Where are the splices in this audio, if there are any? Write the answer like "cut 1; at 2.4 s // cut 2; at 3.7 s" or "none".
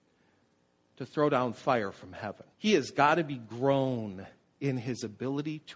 cut 1; at 2.5 s